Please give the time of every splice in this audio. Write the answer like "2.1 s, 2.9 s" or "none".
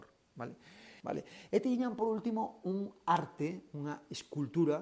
1.0 s